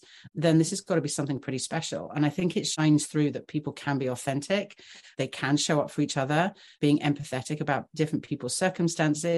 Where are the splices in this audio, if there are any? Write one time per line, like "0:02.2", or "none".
none

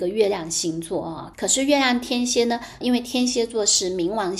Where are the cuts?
0:01.3
0:02.8

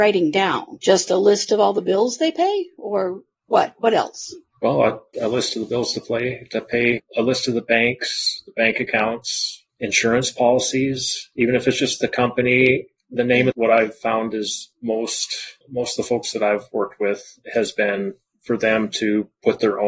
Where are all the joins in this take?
0:05.1
0:13.5

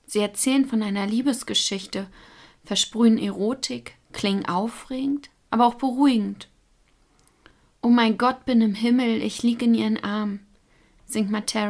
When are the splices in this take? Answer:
none

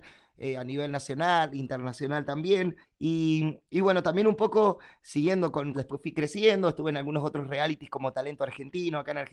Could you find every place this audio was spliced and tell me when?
0:02.8
0:05.7

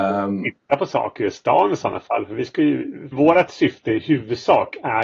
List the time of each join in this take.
0:03.1

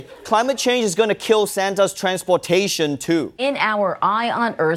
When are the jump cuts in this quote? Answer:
0:03.3

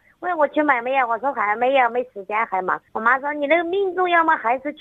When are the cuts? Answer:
0:02.9

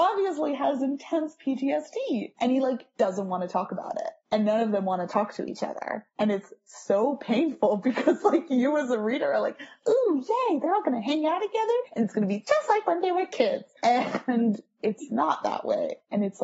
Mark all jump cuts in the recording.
none

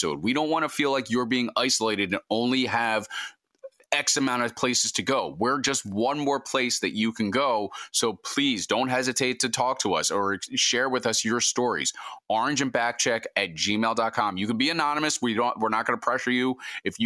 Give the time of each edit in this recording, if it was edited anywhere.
none

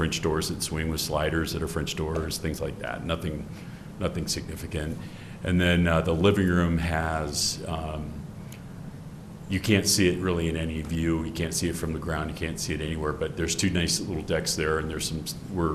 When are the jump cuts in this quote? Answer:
none

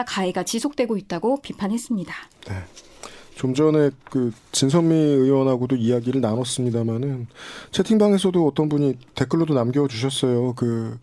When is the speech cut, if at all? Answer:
none

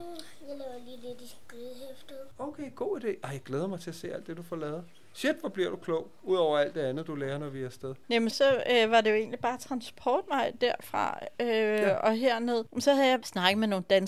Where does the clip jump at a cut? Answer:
0:08.3

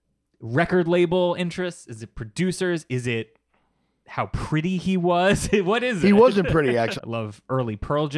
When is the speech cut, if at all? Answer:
0:07.0

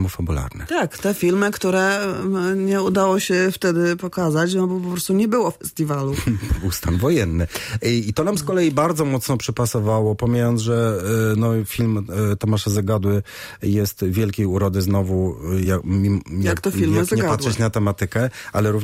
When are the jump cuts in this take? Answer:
none

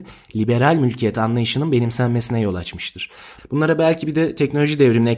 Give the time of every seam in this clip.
0:03.4

